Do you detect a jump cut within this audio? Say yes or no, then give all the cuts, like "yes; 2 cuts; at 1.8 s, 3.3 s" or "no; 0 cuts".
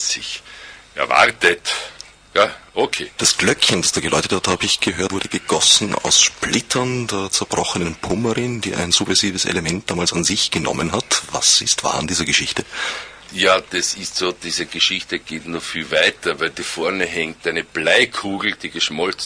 yes; 2 cuts; at 3.2 s, 5.1 s